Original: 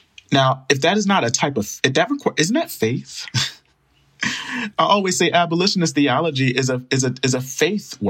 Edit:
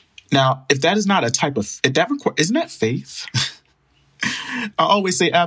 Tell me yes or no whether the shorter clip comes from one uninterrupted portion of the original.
yes